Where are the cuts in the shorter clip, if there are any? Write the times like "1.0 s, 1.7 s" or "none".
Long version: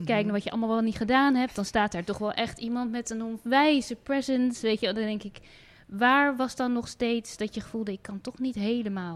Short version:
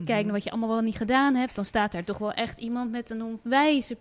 none